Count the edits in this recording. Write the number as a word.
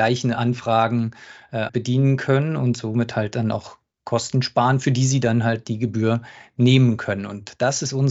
one